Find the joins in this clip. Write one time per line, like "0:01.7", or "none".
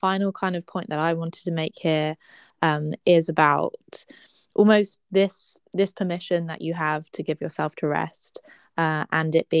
none

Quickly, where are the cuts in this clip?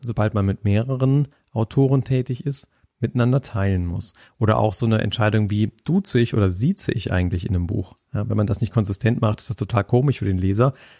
none

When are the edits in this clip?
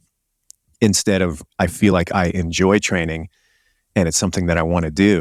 none

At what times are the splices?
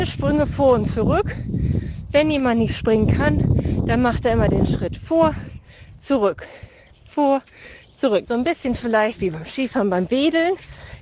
0:08.2

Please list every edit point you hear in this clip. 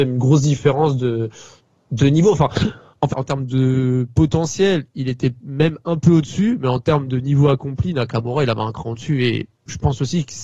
0:03.1

